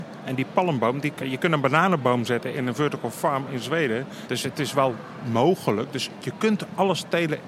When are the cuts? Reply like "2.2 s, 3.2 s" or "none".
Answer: 1.2 s, 4.3 s